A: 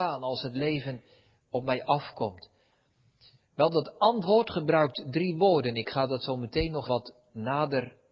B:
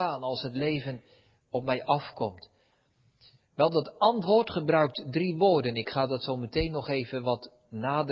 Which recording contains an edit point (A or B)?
A